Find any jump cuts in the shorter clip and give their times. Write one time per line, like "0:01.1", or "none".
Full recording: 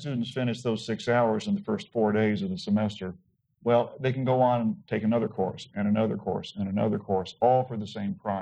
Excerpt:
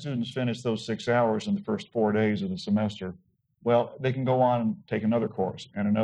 none